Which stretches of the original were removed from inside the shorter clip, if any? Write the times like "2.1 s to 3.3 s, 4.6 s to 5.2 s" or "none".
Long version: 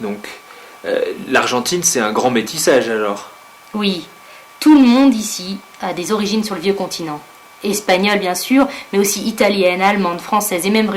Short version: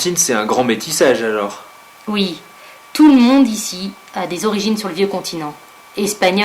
none